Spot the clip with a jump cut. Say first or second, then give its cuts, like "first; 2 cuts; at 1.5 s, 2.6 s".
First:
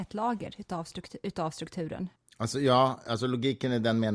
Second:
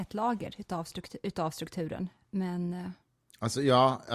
first; 1 cut; at 2.2 s